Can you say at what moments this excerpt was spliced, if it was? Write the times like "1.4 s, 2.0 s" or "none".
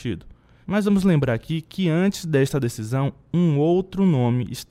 none